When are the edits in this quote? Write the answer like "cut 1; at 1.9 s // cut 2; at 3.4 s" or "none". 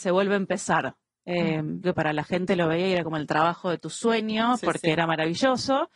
cut 1; at 1.8 s